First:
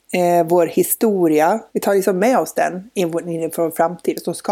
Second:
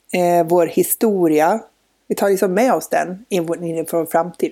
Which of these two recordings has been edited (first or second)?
first